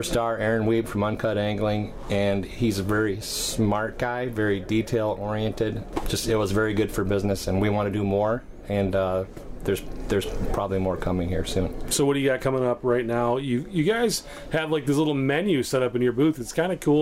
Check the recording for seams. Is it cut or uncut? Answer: uncut